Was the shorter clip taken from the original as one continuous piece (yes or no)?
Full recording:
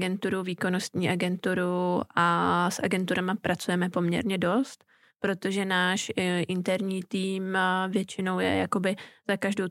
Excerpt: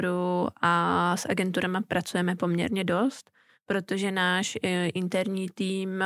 yes